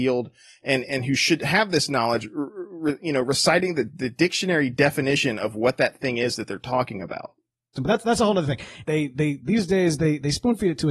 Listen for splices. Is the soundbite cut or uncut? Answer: cut